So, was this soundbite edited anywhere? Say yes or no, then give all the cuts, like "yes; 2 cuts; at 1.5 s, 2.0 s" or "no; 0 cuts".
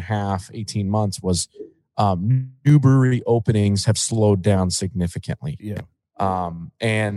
no; 0 cuts